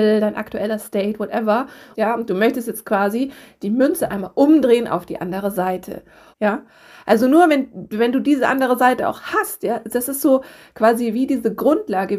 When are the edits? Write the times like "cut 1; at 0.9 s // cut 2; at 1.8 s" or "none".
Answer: cut 1; at 1.9 s // cut 2; at 6.3 s